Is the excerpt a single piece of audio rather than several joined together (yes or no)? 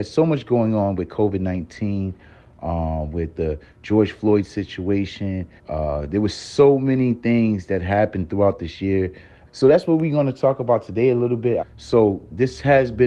no